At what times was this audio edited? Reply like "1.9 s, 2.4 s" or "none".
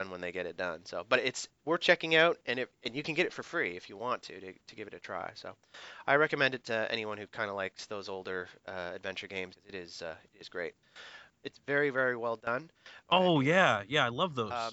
9.5 s, 11.3 s, 13.1 s